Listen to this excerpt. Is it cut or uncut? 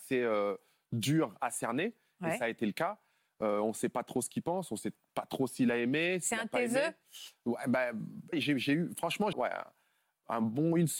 cut